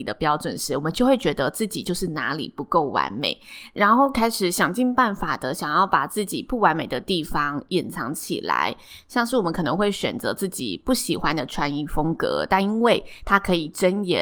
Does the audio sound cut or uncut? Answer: uncut